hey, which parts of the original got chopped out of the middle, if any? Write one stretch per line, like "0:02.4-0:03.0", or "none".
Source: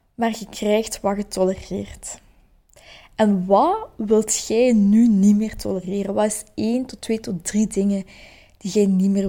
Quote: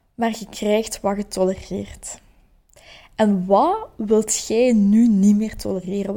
none